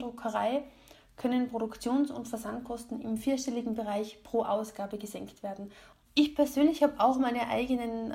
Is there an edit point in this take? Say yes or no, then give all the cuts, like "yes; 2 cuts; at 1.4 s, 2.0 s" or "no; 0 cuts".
yes; 1 cut; at 6.0 s